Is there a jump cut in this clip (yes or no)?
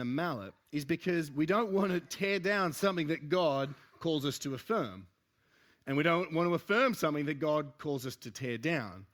no